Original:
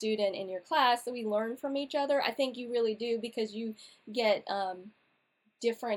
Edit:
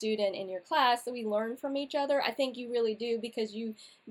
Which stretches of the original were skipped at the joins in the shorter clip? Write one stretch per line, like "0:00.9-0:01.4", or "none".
none